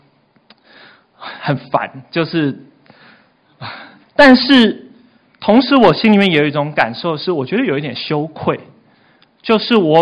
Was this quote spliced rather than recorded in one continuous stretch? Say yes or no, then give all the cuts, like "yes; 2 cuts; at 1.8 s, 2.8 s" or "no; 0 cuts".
yes; 1 cut; at 4.0 s